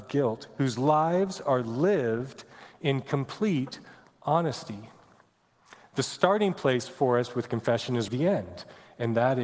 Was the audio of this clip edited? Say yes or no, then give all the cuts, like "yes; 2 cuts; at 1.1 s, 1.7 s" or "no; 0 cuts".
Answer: yes; 1 cut; at 8.1 s